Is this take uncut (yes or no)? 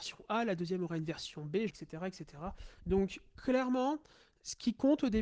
no